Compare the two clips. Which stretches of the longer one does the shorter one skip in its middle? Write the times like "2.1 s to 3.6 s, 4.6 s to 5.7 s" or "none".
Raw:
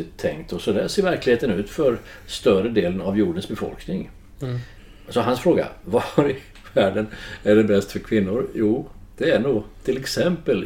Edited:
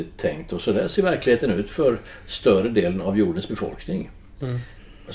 none